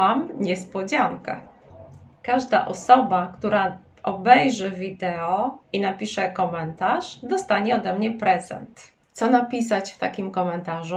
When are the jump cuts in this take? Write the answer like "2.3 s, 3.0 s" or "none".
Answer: 9.0 s